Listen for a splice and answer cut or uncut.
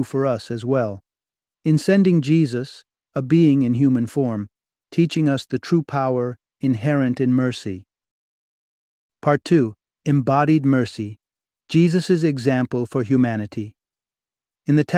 cut